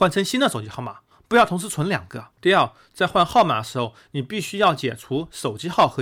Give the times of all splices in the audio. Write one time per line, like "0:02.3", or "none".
0:02.3